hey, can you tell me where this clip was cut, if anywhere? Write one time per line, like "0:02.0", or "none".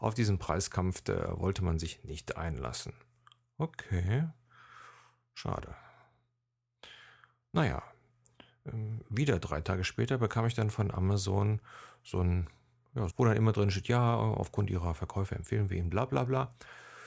0:13.1